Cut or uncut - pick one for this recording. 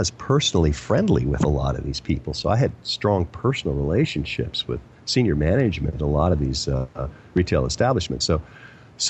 uncut